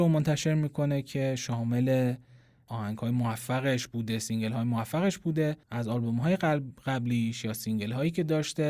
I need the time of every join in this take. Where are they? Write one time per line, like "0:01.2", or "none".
0:05.6